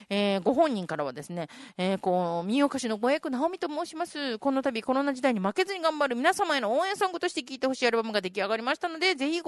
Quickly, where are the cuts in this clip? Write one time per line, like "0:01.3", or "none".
none